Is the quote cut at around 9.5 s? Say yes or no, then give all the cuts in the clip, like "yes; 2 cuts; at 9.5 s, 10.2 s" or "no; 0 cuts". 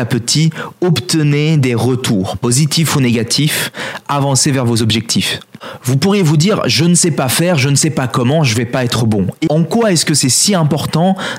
yes; 1 cut; at 9.5 s